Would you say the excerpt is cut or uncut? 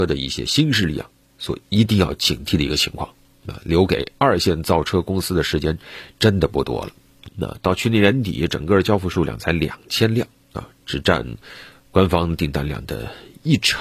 cut